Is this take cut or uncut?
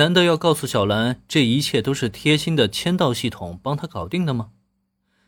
uncut